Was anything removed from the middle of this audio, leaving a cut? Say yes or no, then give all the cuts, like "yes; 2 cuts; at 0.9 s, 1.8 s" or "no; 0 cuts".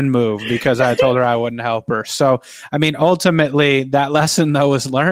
no; 0 cuts